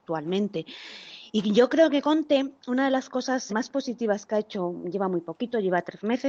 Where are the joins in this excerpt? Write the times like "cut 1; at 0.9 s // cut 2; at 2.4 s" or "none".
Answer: cut 1; at 3.5 s